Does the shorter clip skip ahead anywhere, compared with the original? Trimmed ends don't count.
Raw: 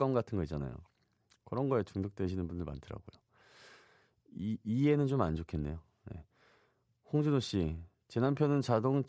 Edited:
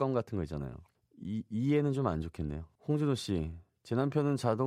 yes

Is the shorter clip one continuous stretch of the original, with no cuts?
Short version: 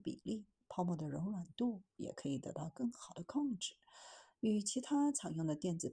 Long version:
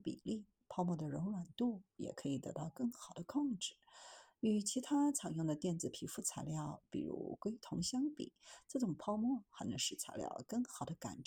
yes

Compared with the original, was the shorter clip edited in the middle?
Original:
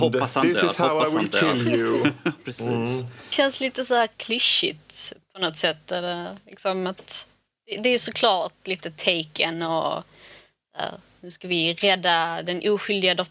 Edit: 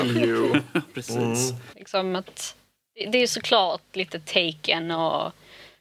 yes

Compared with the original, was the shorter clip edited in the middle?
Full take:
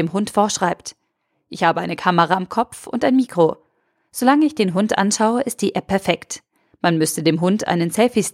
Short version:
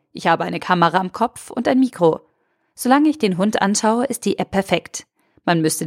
no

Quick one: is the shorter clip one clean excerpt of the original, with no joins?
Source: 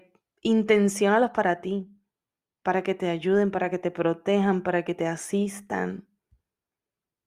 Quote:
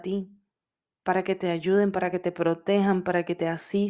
yes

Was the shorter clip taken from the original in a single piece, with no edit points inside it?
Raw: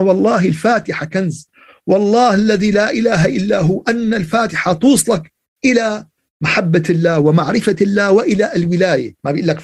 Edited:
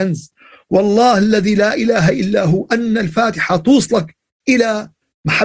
yes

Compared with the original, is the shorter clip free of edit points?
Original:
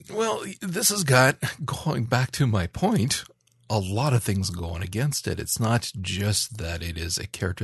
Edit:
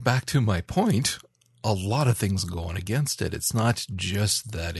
yes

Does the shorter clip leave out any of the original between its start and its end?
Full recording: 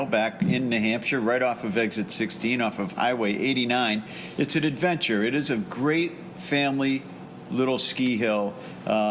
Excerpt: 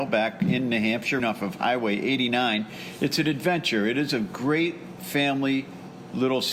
yes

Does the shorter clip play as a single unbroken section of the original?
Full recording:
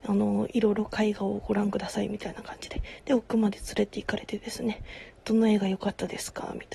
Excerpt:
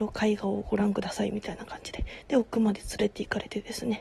yes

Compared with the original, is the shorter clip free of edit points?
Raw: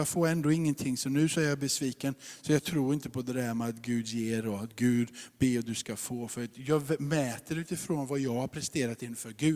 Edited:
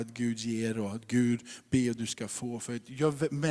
yes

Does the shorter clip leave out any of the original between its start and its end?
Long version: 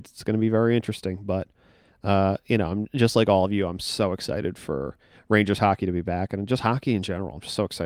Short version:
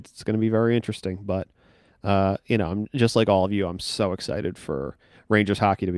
no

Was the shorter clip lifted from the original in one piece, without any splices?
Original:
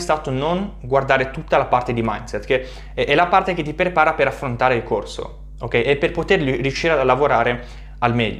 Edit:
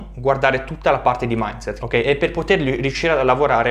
no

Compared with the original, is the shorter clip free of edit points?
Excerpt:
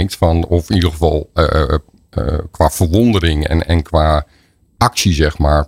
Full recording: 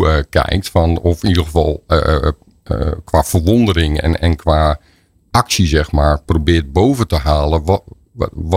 yes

